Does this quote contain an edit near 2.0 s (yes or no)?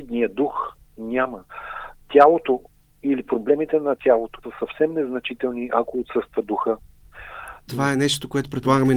no